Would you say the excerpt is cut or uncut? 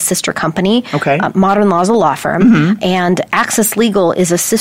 uncut